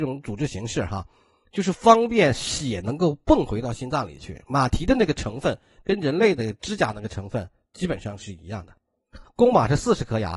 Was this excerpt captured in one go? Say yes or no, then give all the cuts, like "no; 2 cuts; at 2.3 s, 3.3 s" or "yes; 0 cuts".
no; 1 cut; at 9.2 s